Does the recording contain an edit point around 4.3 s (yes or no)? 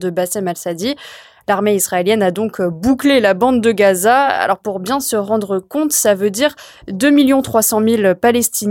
no